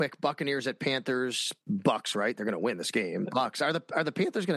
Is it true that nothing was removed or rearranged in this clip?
no; 2 cuts; at 1.6 s, 3.2 s

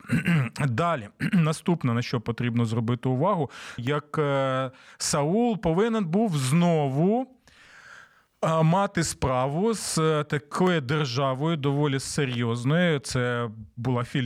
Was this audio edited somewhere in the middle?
yes; 1 cut; at 3.8 s

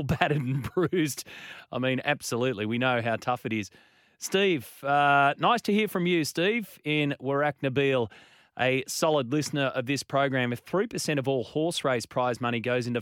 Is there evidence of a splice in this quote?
no; 0 cuts

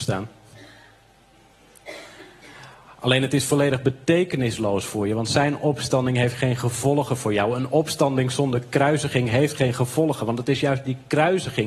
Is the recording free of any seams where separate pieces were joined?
yes; 0 cuts

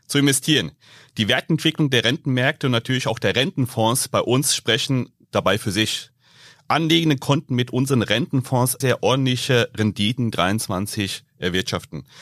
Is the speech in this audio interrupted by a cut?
yes; 1 cut; at 8.8 s

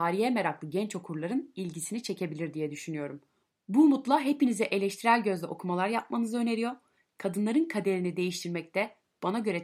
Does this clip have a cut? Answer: no; 0 cuts

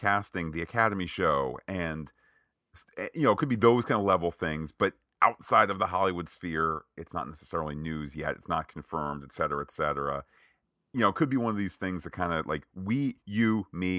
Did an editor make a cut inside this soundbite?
no; 0 cuts

